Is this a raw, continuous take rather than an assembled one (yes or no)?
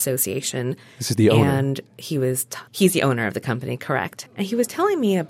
no